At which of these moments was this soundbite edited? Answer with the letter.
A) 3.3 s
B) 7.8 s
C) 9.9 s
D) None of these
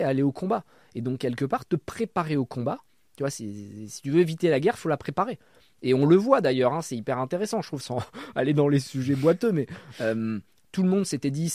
B